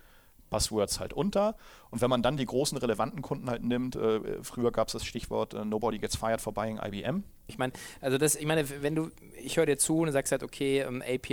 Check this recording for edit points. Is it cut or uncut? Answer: cut